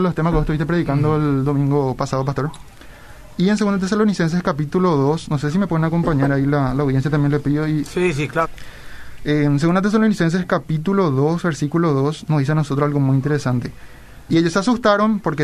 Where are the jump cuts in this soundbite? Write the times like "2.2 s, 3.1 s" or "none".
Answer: 8.4 s, 14.3 s